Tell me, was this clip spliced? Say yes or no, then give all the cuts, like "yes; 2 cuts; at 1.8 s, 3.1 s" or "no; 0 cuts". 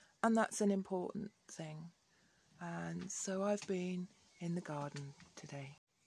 no; 0 cuts